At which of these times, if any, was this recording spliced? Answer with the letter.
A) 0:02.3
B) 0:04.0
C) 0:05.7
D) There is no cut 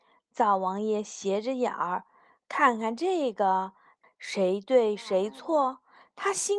B